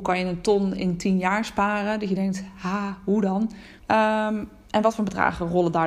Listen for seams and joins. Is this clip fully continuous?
no; 1 cut; at 3.8 s

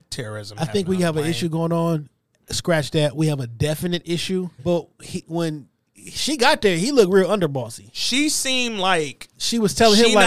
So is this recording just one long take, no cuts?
no; 1 cut; at 4.6 s

